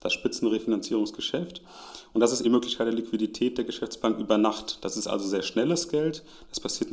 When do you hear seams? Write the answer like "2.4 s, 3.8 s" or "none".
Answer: 2.4 s